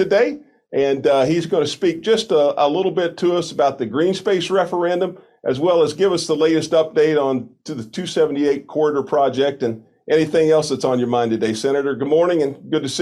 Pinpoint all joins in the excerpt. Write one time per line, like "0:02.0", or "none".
none